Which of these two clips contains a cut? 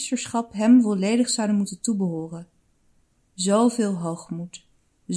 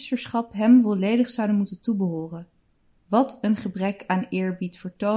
second; 1 cut; at 3.0 s

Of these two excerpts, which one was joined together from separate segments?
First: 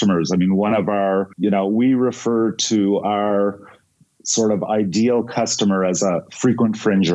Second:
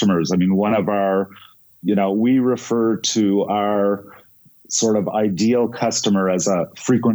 first; 1 cut; at 1.3 s

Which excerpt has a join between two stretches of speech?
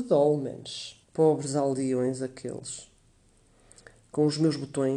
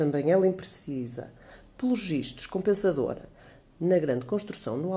first; 1 cut; at 1.0 s

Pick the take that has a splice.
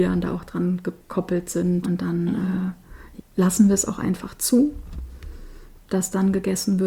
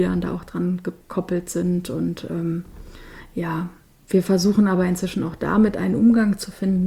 first; 3 cuts; at 1.8 s, 3.2 s, 5.8 s

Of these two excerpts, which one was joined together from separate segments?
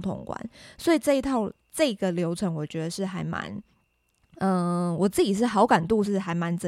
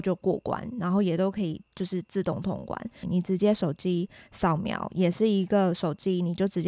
second; 1 cut; at 3.0 s

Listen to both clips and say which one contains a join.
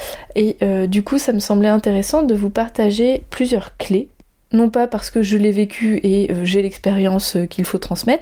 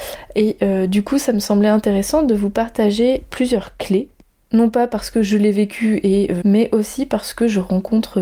second; 1 cut; at 6.4 s

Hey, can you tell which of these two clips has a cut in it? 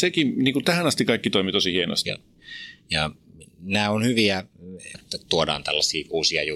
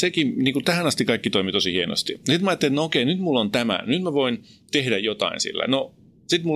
first; 2 cuts; at 2.0 s, 4.9 s

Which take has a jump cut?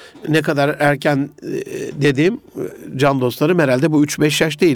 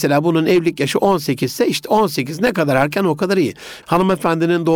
second; 1 cut; at 3.8 s

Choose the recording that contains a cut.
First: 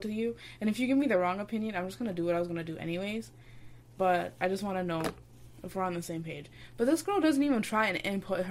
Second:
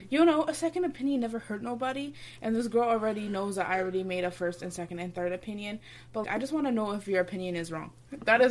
second; 1 cut; at 6.2 s

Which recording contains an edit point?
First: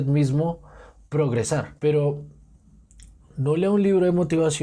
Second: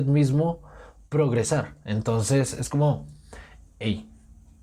first; 1 cut; at 1.8 s

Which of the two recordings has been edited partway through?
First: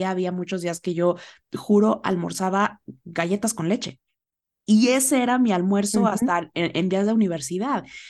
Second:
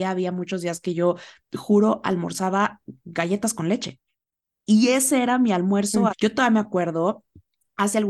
second; 1 cut; at 6.1 s

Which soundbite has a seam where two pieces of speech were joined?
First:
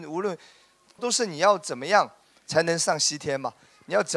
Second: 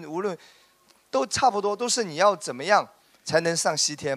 first; 1 cut; at 1.0 s

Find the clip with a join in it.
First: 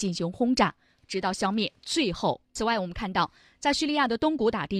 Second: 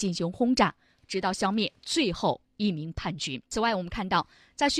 first; 1 cut; at 2.5 s

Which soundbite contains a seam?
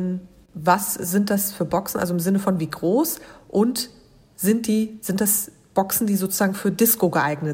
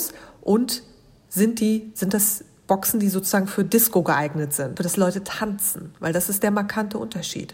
second; 1 cut; at 4.8 s

